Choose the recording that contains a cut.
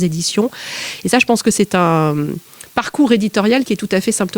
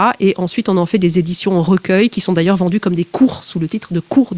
first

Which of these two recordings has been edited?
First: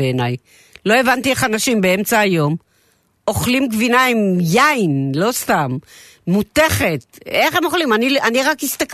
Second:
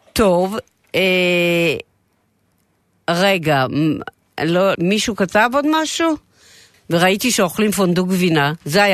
second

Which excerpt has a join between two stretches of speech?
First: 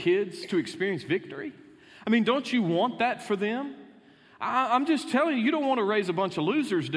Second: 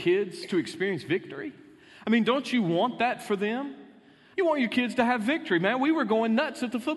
second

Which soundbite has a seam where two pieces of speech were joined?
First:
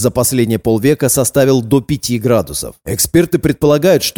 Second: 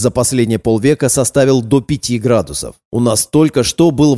first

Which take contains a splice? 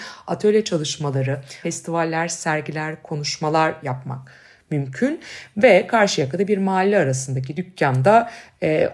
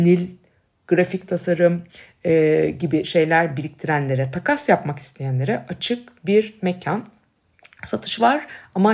first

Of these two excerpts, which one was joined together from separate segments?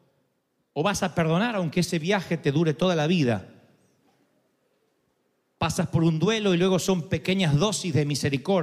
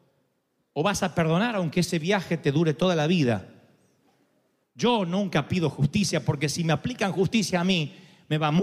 second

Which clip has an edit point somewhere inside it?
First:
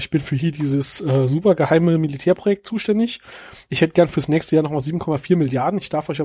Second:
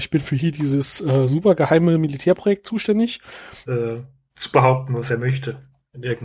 second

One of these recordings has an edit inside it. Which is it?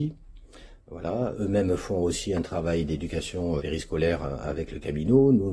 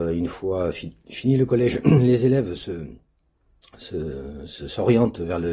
first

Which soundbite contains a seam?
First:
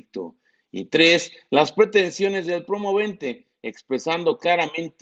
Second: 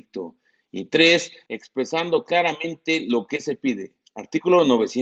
second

